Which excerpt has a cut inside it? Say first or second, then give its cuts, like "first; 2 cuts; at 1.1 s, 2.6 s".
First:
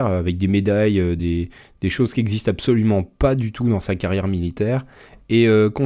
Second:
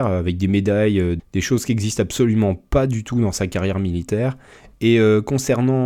second; 1 cut; at 1.2 s